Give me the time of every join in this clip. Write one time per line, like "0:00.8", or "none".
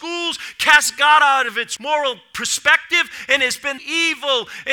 0:01.8
0:03.8

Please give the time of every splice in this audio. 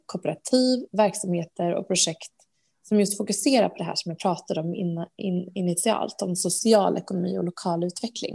none

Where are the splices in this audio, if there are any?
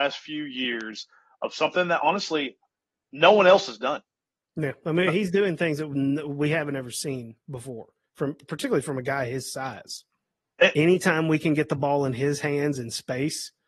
0:10.8

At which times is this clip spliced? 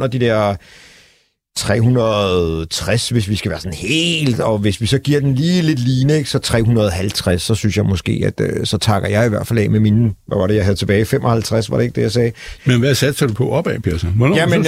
0:12.6

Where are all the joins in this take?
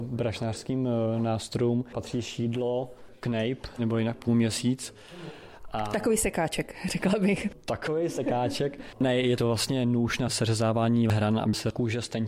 0:03.8

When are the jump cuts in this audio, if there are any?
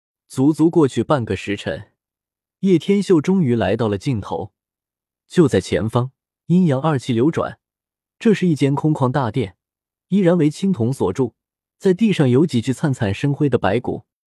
0:06.3

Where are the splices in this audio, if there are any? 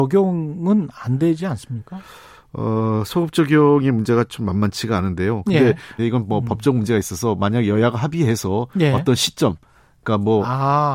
0:06.0

